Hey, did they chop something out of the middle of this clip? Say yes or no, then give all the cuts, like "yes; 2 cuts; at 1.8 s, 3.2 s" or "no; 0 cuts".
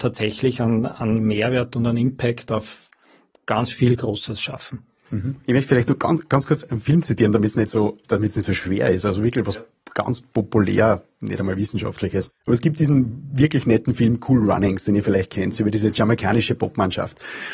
no; 0 cuts